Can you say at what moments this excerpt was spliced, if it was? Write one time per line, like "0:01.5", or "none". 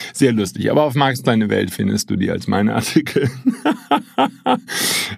none